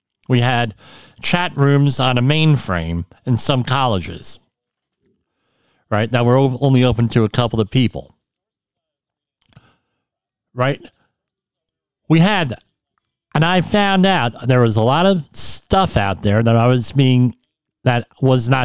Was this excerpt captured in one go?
yes; 0 cuts

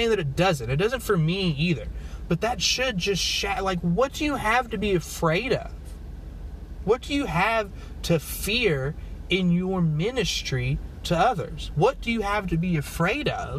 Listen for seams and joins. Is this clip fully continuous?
no; 1 cut; at 11.7 s

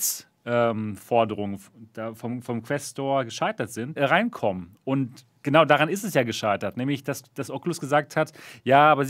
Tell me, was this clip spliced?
yes; 1 cut; at 4.0 s

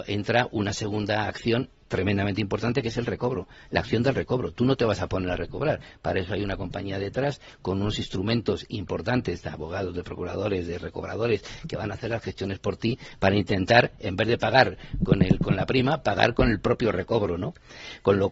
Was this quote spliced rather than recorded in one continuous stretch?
no; 0 cuts

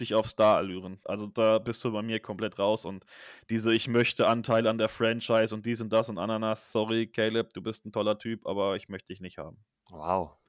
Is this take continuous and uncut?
no; 1 cut; at 1.0 s

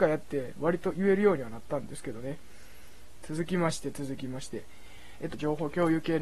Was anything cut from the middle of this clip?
yes; 2 cuts; at 3.2 s, 5.3 s

